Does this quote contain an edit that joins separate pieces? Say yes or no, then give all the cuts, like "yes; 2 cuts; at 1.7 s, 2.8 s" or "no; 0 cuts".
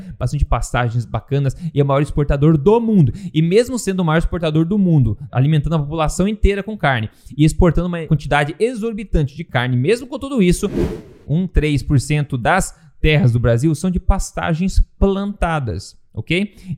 yes; 1 cut; at 11.2 s